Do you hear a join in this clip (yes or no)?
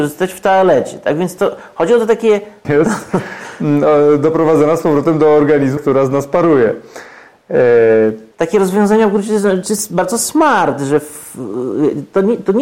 yes